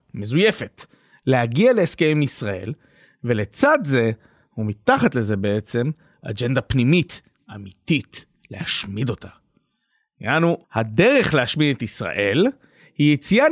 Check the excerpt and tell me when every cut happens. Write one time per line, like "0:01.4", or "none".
0:08.4
0:10.6